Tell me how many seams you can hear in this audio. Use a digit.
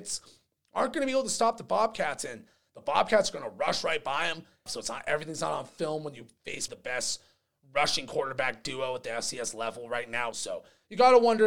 3